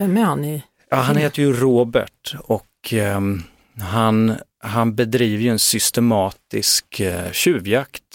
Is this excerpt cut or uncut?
uncut